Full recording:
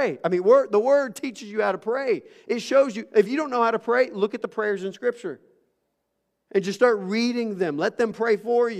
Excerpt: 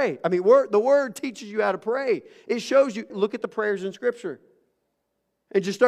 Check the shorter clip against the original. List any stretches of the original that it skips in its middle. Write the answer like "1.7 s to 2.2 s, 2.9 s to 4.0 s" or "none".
3.1 s to 4.1 s